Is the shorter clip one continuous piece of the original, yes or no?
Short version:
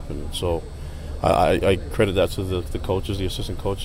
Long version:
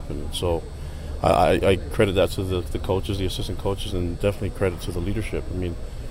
yes